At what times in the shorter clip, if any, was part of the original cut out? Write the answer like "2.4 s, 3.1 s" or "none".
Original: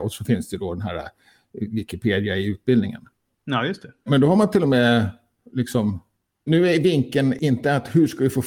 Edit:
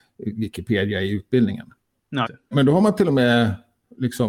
2.3 s